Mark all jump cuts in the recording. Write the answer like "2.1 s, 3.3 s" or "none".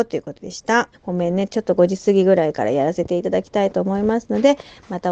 0.9 s